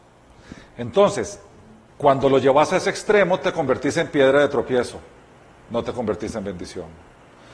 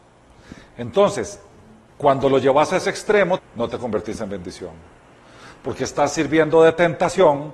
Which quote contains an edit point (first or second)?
second